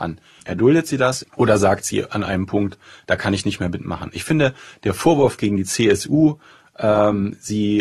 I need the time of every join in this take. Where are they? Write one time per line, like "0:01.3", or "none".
0:01.2